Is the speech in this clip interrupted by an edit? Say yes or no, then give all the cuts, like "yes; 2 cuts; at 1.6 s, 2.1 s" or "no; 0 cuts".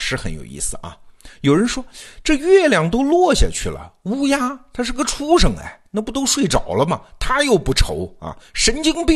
no; 0 cuts